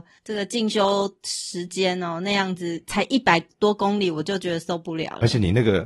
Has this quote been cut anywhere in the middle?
no; 0 cuts

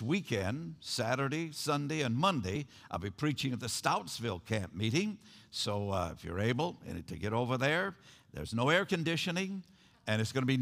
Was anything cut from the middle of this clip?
no; 0 cuts

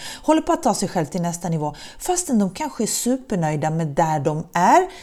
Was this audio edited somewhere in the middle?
no; 0 cuts

